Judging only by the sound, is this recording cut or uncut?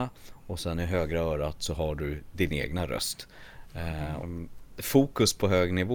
cut